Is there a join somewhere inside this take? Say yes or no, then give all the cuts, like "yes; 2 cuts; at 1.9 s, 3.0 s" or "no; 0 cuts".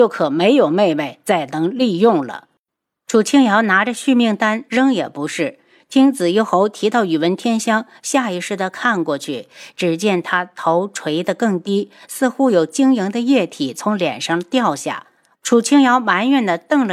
yes; 2 cuts; at 4.7 s, 15.3 s